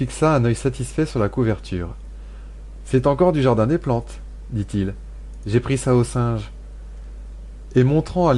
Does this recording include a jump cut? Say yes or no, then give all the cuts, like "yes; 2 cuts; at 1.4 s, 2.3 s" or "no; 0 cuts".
no; 0 cuts